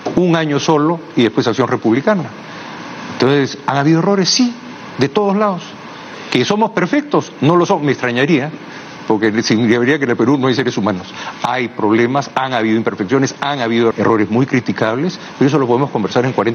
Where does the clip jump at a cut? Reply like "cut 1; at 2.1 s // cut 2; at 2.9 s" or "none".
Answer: cut 1; at 13.9 s